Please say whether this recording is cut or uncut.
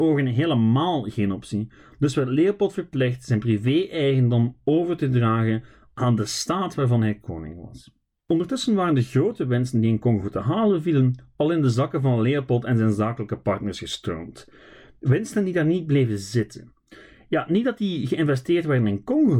uncut